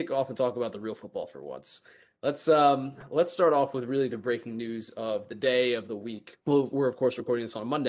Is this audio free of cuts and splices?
no; 1 cut; at 6.4 s

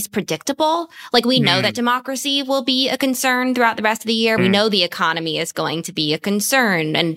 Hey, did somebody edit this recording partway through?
yes; 1 cut; at 4.4 s

